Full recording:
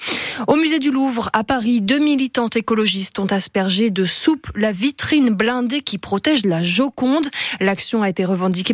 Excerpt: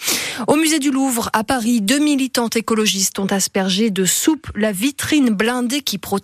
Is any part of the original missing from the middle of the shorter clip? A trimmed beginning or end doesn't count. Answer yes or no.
no